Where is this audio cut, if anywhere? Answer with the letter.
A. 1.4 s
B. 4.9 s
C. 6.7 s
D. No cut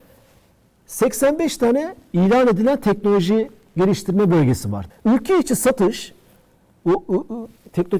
B